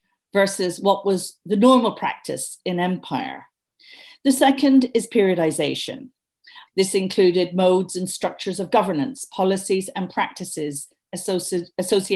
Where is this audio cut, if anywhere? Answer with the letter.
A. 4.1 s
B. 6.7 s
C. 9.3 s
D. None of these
B